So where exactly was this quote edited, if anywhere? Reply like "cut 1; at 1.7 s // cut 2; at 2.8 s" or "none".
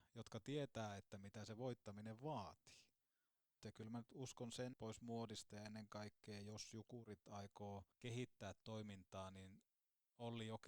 cut 1; at 3.6 s // cut 2; at 4.7 s // cut 3; at 7.9 s